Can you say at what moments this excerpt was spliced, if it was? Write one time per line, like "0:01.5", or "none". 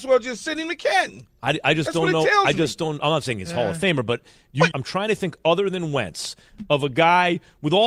0:04.7